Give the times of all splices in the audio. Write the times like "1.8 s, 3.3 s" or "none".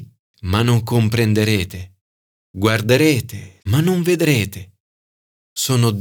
3.6 s